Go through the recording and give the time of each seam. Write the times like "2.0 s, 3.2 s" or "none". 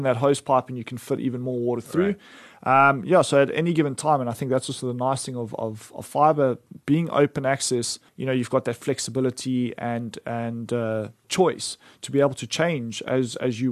8.1 s, 11.2 s